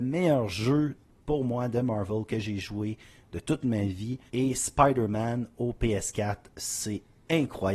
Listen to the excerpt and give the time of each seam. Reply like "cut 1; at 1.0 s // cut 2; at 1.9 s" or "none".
cut 1; at 4.3 s